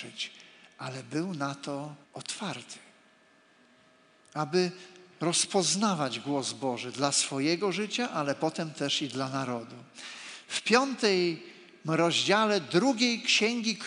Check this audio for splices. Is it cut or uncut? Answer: cut